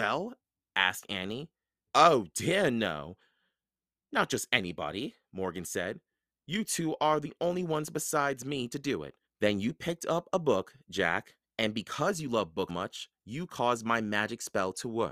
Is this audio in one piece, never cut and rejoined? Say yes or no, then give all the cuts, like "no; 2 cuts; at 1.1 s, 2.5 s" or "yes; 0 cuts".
no; 3 cuts; at 1.9 s, 9.3 s, 12.7 s